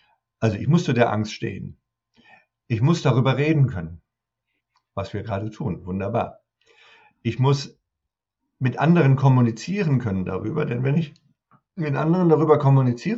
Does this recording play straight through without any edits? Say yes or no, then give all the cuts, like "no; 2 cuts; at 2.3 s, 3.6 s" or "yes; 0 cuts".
yes; 0 cuts